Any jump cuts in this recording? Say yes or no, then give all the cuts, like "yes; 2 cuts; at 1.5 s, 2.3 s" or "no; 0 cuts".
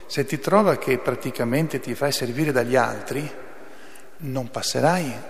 no; 0 cuts